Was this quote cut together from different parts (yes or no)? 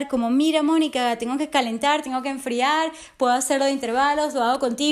no